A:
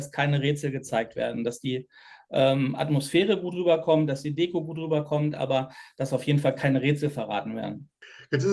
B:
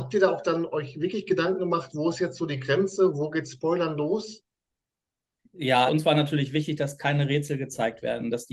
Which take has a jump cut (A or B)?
B